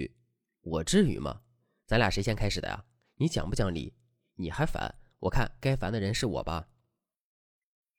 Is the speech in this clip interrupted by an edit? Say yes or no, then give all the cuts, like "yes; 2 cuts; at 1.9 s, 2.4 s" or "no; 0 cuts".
no; 0 cuts